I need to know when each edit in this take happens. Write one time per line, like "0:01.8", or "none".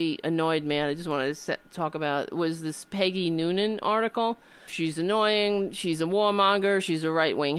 0:04.7